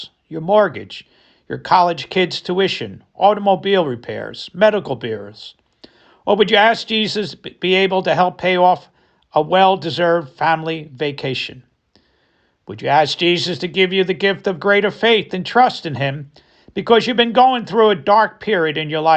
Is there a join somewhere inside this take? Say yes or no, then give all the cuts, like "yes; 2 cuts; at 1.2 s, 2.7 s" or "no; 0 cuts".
no; 0 cuts